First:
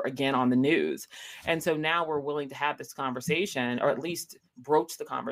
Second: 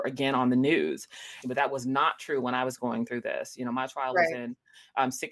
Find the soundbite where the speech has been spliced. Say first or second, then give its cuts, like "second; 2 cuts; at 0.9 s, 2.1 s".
second; 1 cut; at 1.4 s